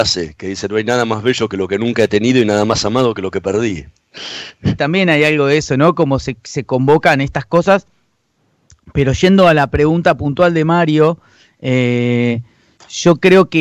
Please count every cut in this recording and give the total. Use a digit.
1